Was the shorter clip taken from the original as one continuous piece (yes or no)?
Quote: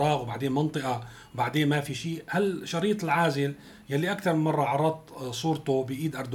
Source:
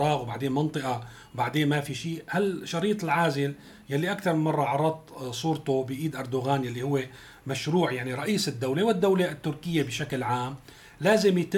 yes